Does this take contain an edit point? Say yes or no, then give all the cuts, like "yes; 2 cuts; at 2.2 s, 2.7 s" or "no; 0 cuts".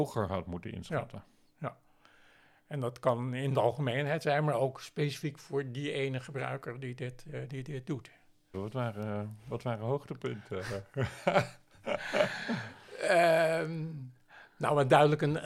yes; 1 cut; at 8.5 s